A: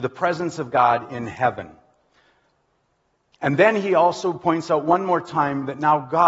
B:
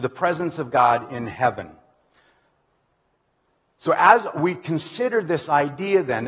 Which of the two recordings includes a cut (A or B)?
A